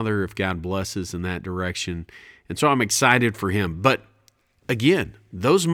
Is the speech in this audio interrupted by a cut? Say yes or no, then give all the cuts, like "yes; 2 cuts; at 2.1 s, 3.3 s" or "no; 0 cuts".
no; 0 cuts